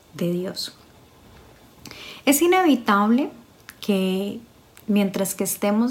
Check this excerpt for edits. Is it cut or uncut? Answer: uncut